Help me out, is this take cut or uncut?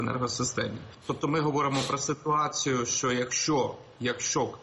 uncut